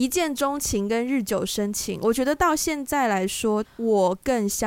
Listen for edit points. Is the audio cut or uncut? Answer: cut